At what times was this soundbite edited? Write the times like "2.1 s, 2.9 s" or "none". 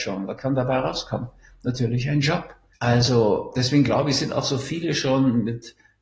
2.7 s